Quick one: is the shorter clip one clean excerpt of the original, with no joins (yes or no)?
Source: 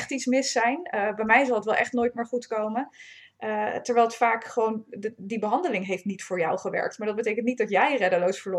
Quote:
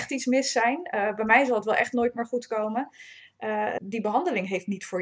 no